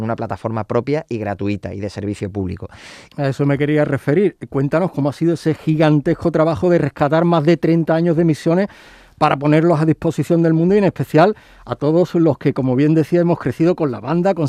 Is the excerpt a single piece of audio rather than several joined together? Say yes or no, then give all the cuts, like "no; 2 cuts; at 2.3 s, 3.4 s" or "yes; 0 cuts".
no; 1 cut; at 3.1 s